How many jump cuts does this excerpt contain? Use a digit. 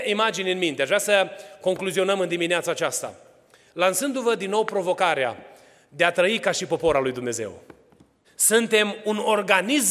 1